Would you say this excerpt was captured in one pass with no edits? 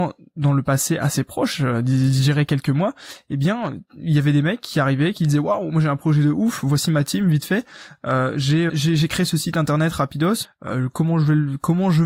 no; 2 cuts; at 8.7 s, 10.4 s

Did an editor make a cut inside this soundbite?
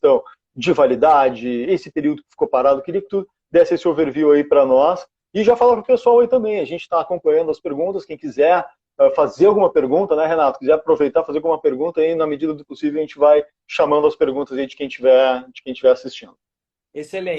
no; 0 cuts

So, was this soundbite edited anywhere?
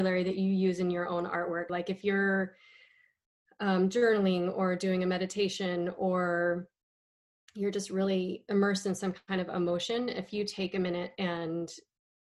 yes; 1 cut; at 1.7 s

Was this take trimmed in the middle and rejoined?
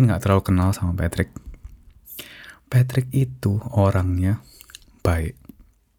no; 0 cuts

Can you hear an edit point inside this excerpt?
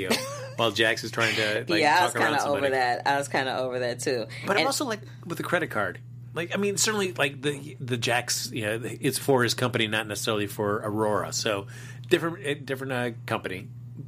no; 0 cuts

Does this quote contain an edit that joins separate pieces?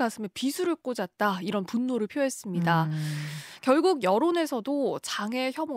no; 0 cuts

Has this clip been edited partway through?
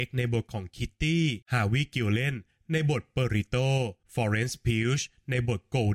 yes; 2 cuts; at 1.4 s, 4.0 s

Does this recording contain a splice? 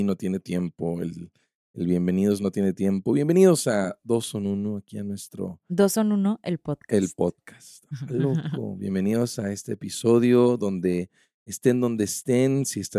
no; 0 cuts

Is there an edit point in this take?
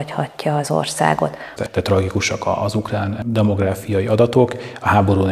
yes; 1 cut; at 1.6 s

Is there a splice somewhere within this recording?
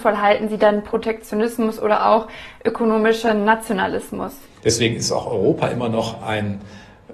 yes; 1 cut; at 4.6 s

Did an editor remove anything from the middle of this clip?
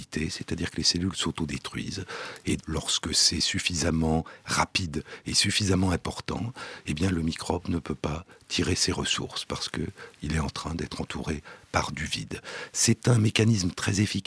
yes; 1 cut; at 2.6 s

